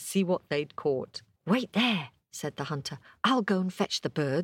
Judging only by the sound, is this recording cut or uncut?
cut